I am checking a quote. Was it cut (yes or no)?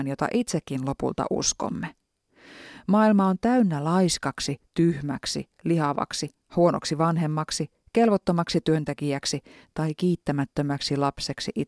no